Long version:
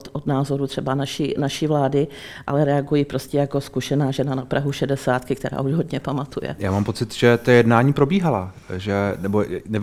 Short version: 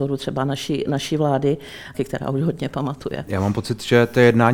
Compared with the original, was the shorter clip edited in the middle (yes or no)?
yes